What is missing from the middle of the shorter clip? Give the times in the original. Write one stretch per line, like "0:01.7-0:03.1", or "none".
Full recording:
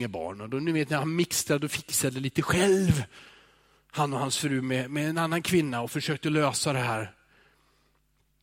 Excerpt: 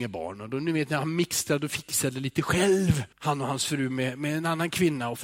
0:03.1-0:03.8